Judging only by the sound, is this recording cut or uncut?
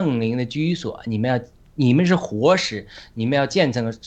uncut